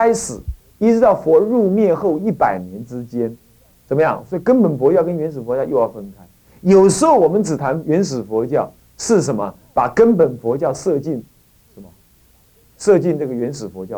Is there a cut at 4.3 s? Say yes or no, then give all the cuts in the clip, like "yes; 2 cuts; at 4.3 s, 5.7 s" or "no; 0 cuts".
yes; 1 cut; at 4.3 s